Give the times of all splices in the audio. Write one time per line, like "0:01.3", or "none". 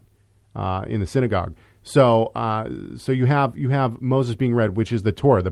none